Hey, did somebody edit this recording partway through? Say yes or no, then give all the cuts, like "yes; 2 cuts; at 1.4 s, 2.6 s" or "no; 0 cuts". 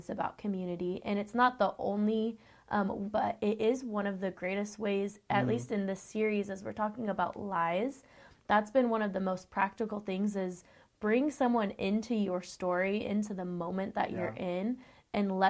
yes; 1 cut; at 3.1 s